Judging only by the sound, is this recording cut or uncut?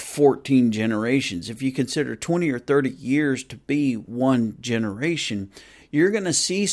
cut